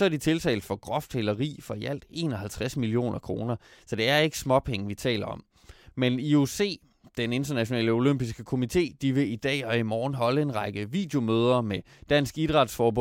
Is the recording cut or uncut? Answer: cut